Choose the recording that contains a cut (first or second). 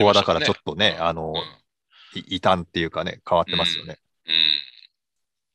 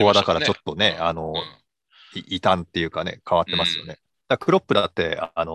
second